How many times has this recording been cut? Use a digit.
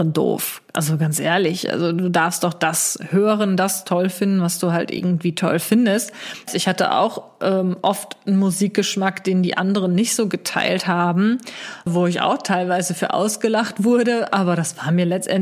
2